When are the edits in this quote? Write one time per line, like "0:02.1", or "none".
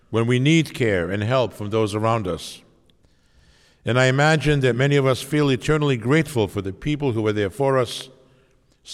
none